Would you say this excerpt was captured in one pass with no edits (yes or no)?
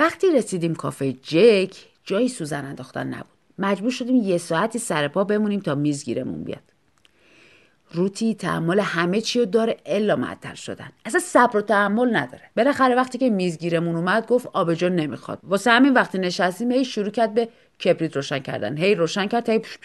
no